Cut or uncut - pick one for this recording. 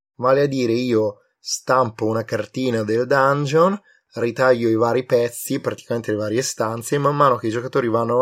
uncut